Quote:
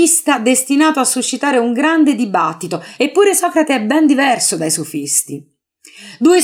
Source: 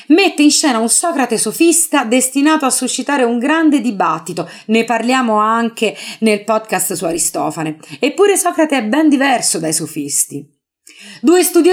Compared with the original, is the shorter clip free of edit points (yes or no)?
no